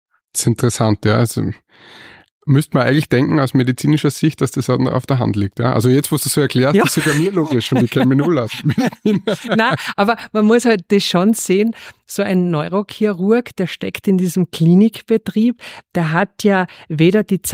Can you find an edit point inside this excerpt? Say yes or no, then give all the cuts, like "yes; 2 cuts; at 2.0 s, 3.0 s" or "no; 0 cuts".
no; 0 cuts